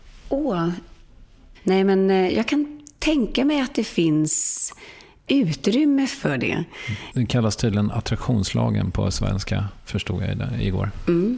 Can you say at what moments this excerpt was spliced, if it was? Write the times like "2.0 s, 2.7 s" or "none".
7.1 s